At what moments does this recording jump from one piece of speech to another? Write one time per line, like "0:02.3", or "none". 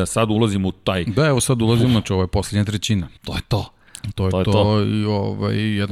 0:03.2

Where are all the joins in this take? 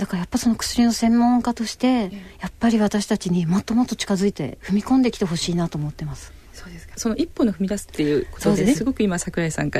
0:04.3
0:06.9
0:08.7

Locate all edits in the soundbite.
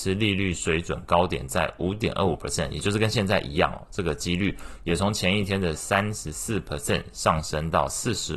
none

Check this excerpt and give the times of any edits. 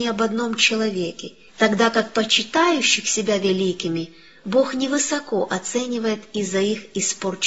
0:01.5

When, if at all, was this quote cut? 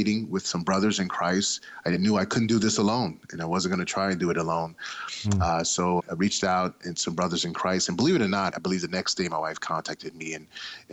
0:06.0
0:08.5

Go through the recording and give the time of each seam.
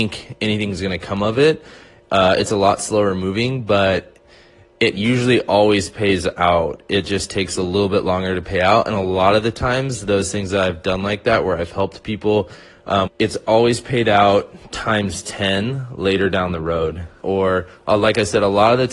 0:13.1
0:17.2

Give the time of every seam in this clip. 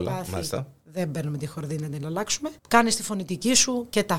0:02.6

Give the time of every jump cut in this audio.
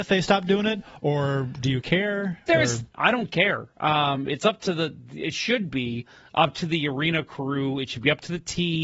0:02.9

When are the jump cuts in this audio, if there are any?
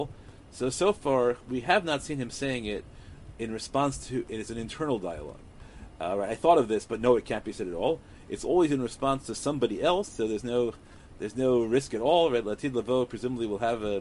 0:10.1

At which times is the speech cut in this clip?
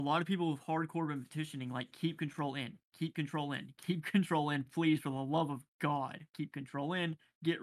none

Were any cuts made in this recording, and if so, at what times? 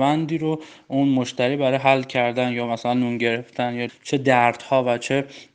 0:03.9

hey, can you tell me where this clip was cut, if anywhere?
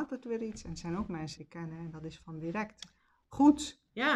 0:01.4

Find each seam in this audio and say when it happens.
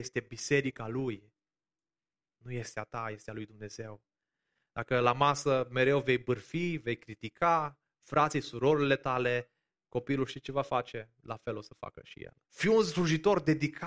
0:12.4

